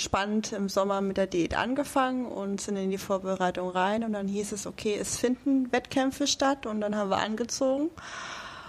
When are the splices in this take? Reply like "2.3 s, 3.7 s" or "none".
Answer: none